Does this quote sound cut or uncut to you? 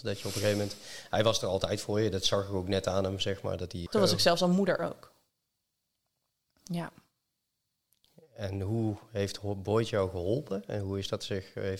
cut